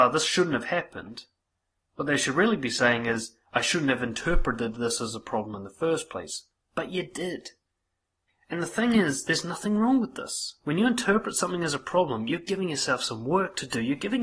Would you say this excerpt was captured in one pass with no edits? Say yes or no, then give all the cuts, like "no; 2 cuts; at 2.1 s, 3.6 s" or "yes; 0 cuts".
yes; 0 cuts